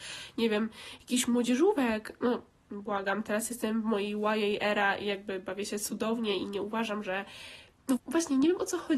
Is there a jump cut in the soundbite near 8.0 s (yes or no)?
yes